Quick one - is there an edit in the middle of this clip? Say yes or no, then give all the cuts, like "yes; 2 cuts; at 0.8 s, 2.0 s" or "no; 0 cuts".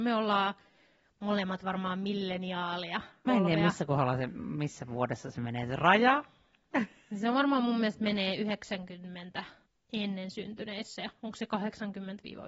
yes; 1 cut; at 3.3 s